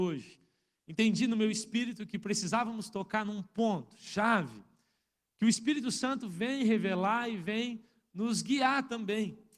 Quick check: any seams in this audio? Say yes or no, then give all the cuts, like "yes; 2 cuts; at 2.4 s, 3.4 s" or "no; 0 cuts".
no; 0 cuts